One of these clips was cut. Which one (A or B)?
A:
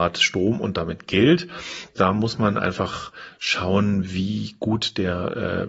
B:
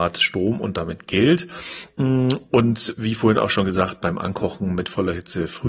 A